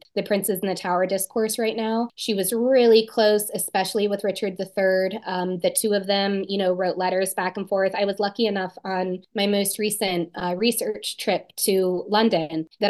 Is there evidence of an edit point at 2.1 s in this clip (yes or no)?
yes